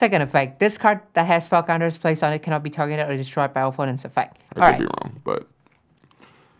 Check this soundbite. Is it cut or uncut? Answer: cut